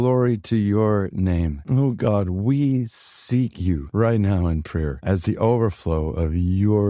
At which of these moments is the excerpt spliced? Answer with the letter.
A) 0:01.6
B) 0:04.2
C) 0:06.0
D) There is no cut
D